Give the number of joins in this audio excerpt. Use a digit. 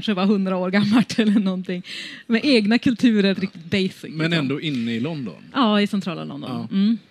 1